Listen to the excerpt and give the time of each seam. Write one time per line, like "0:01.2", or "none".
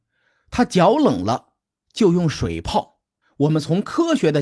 0:03.2